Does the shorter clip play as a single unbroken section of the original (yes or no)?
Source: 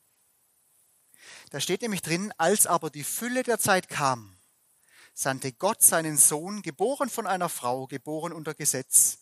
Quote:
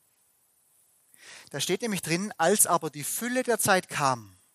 yes